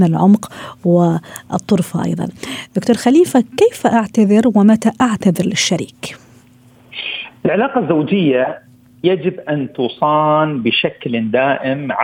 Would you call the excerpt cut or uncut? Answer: uncut